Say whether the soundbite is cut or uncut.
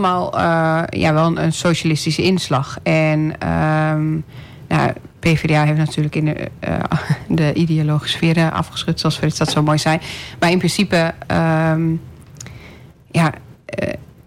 uncut